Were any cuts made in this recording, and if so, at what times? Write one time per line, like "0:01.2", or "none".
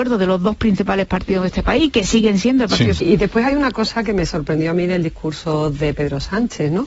0:03.0